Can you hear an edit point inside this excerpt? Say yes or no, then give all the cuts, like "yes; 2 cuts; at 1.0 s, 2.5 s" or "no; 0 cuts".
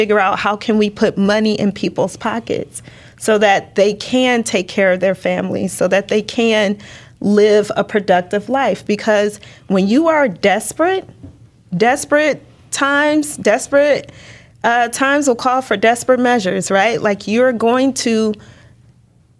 no; 0 cuts